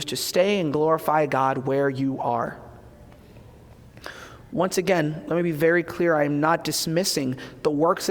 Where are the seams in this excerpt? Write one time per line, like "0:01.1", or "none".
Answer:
none